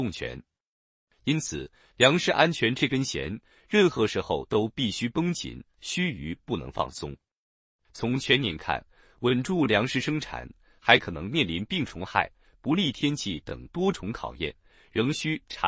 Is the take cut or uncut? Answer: uncut